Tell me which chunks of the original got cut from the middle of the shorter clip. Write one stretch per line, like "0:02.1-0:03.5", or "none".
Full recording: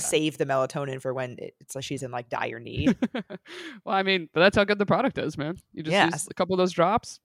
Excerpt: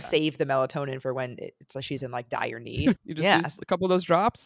0:03.0-0:05.6